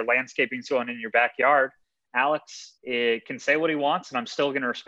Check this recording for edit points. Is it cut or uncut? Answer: cut